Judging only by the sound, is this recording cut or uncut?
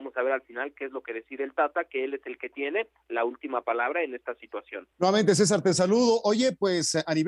cut